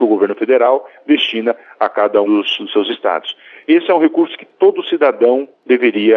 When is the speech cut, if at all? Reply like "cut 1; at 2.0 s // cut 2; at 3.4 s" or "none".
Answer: cut 1; at 2.2 s